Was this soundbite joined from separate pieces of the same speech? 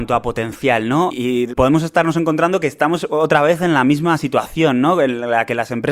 no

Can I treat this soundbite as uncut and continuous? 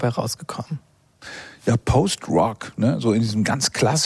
yes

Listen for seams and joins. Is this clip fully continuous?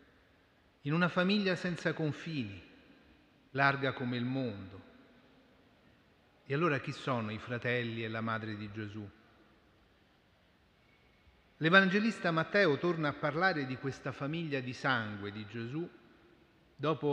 yes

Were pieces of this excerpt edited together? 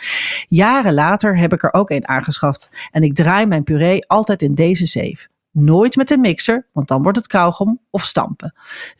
no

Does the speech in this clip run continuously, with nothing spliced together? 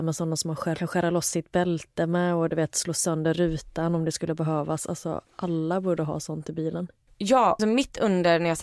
no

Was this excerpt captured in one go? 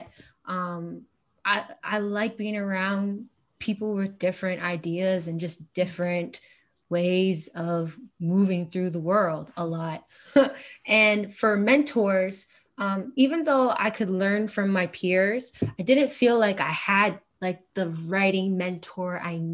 no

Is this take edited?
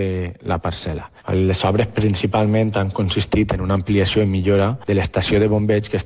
yes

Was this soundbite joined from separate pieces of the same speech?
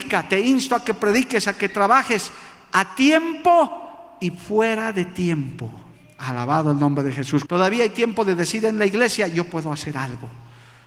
yes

